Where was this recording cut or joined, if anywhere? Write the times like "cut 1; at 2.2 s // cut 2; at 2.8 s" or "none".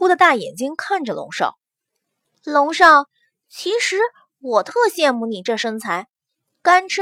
none